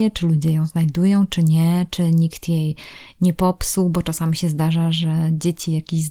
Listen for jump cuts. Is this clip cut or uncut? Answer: uncut